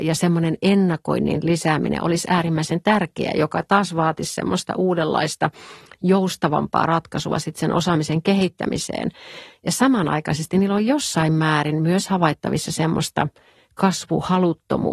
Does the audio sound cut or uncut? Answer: uncut